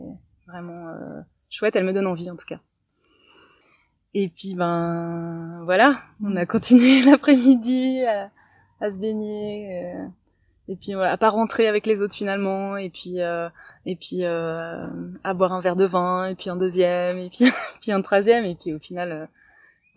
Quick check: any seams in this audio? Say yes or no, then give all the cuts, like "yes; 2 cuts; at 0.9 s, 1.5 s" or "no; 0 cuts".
no; 0 cuts